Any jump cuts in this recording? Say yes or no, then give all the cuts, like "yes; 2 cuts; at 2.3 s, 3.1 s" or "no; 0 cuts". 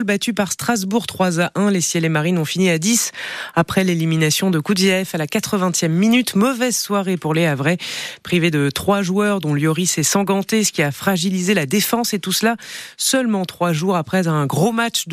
no; 0 cuts